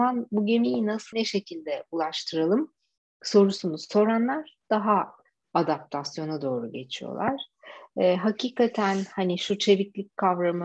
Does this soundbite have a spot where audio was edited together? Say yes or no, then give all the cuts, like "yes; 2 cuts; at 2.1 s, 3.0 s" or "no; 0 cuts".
yes; 1 cut; at 1.1 s